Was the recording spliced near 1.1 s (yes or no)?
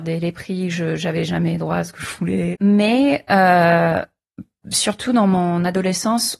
no